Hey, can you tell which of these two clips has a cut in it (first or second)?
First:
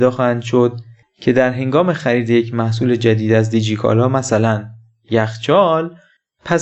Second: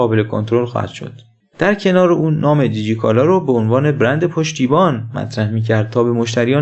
second